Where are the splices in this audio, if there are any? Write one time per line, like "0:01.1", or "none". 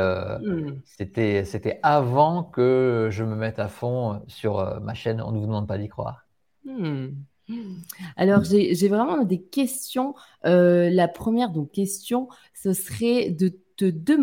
none